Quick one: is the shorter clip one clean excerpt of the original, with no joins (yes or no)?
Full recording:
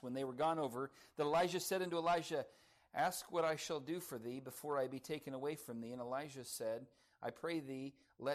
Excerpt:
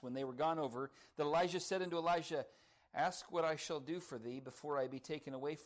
yes